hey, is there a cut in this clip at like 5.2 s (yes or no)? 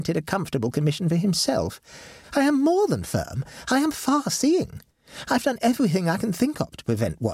no